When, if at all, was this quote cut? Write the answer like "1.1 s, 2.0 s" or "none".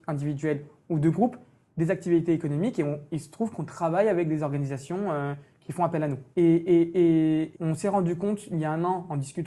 6.3 s, 7.5 s